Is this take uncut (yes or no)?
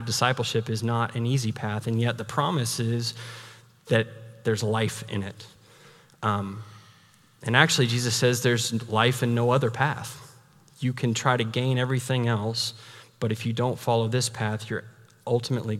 yes